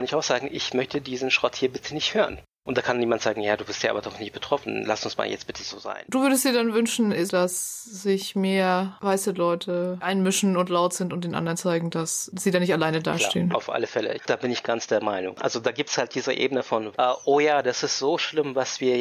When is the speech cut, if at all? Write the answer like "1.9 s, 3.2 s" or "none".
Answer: 7.3 s, 14.2 s